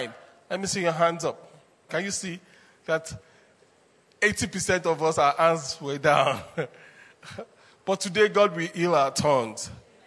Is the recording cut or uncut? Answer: cut